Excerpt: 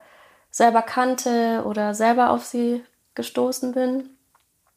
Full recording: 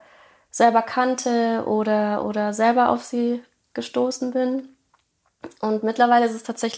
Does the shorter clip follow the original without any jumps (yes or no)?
no